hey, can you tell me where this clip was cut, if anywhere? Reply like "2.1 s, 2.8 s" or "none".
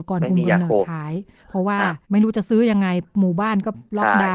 2.0 s